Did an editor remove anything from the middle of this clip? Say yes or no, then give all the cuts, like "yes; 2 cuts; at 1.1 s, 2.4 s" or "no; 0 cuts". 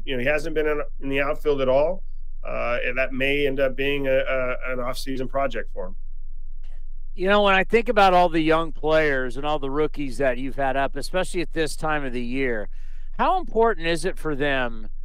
no; 0 cuts